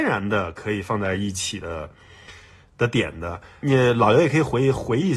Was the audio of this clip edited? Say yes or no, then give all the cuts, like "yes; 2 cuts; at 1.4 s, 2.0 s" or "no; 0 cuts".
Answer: no; 0 cuts